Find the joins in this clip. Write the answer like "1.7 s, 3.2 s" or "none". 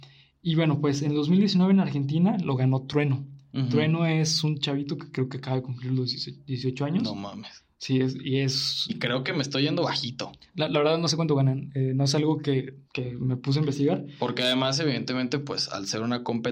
8.9 s, 12.8 s